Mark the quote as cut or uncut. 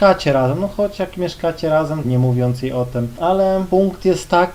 cut